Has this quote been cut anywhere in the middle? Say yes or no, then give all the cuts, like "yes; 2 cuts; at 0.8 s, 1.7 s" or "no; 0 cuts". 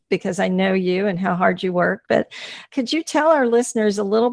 no; 0 cuts